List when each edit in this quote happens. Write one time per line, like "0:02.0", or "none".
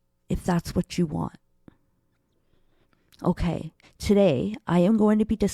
0:03.8